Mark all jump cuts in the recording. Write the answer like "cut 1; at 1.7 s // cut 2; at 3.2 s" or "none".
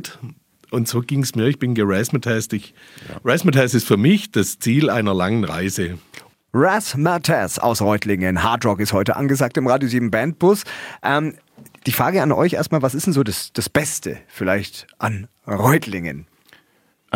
cut 1; at 6.3 s